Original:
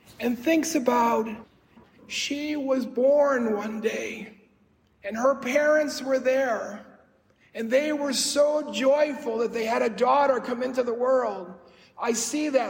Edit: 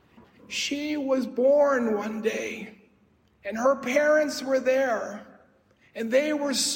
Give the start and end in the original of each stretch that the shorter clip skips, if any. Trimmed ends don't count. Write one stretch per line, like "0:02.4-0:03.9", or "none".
none